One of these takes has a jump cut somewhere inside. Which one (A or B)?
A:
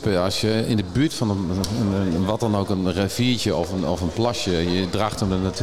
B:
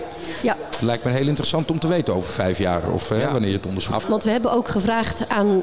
B